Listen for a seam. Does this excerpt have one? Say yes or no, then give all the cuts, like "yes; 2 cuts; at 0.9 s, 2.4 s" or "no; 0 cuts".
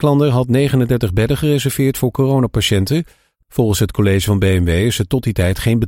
yes; 1 cut; at 3.4 s